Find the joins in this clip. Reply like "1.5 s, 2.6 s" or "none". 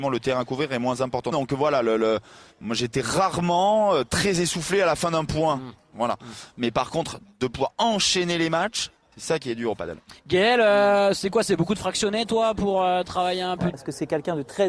1.3 s, 13.7 s

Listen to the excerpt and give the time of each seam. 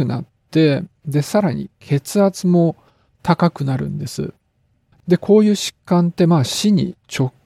4.9 s

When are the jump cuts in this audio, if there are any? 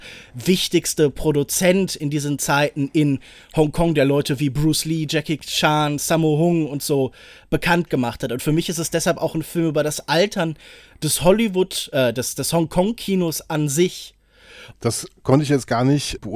14.7 s

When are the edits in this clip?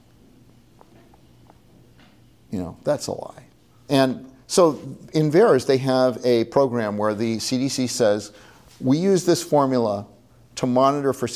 none

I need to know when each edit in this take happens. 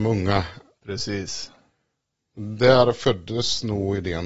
none

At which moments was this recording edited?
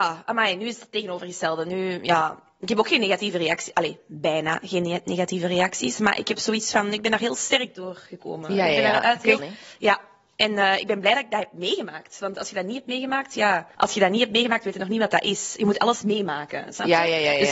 9.4 s, 13.7 s

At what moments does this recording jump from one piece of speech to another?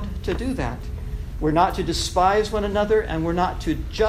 none

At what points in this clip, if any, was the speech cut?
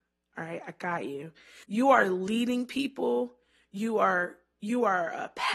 1.6 s, 4.5 s

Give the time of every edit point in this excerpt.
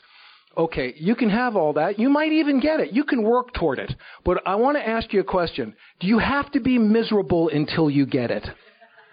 none

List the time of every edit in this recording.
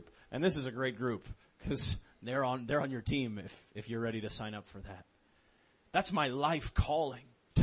5.7 s

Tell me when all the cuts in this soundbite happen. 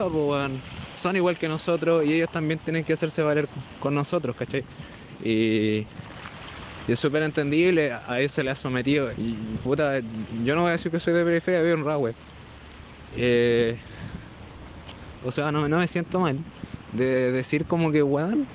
9.1 s, 13.1 s, 15.2 s

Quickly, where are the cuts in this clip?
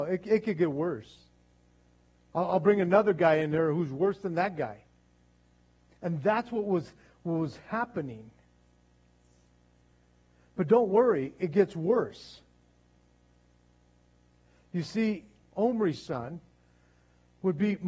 15.4 s

